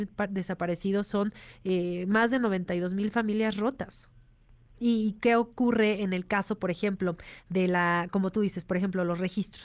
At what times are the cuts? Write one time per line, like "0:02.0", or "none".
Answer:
0:04.7

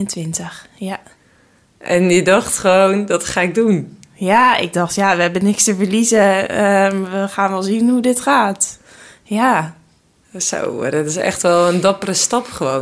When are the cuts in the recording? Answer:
none

